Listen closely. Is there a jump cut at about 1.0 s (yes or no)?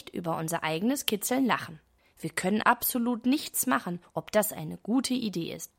no